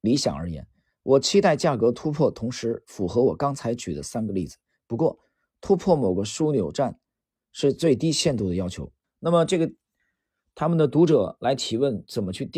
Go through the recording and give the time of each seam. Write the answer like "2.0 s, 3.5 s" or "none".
9.0 s